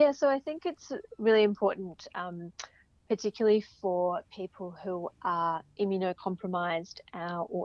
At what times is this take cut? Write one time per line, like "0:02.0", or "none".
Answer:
none